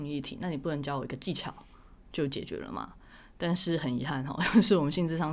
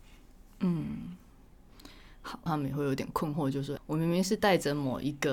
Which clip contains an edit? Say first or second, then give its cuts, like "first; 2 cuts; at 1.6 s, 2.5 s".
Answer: second; 2 cuts; at 2.5 s, 3.8 s